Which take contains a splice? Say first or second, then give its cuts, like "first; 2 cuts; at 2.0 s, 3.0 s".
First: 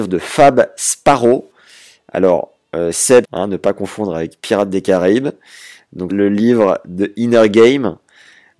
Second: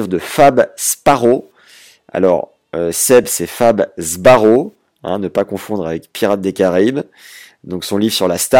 first; 2 cuts; at 3.2 s, 6.1 s